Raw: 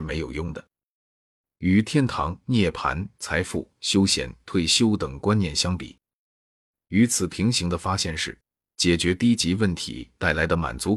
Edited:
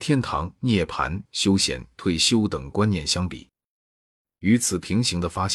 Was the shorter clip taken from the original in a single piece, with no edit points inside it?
no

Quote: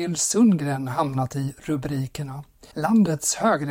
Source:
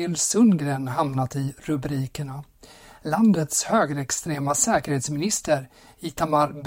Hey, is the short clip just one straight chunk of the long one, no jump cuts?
no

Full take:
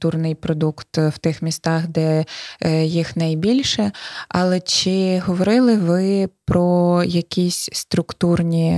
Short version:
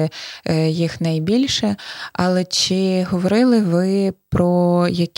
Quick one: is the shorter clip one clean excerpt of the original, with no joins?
yes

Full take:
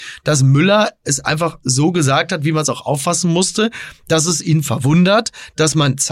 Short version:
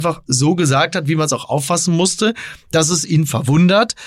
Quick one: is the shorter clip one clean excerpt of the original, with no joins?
yes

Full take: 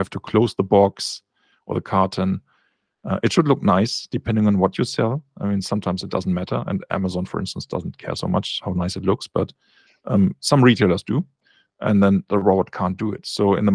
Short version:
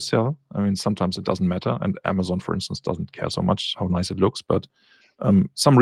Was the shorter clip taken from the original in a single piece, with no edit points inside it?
yes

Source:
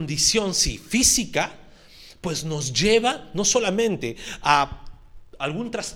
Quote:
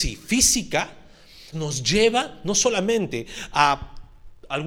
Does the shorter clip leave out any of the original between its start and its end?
yes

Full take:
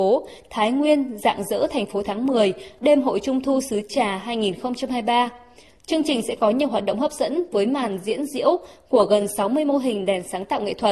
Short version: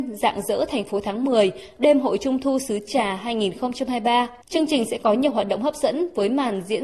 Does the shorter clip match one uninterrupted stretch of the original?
no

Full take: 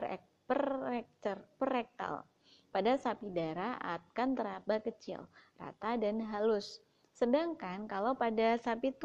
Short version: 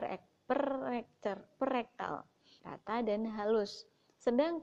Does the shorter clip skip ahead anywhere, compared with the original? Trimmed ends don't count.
yes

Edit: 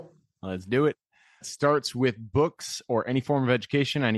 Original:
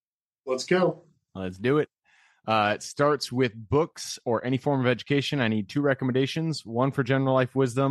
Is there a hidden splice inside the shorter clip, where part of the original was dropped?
yes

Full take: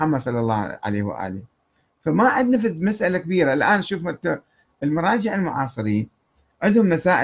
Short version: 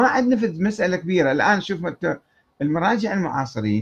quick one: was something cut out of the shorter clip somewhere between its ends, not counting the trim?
no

